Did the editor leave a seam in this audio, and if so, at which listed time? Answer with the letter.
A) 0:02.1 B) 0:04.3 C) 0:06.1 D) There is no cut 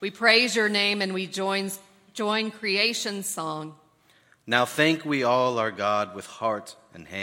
D